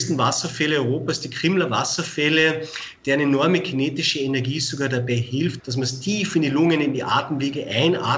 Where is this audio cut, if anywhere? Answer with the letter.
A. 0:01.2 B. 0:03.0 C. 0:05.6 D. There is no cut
C